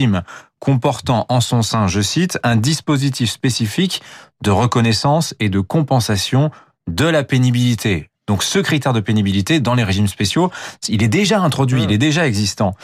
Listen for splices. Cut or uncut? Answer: uncut